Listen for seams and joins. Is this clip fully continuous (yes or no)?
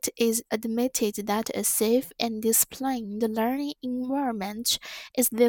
yes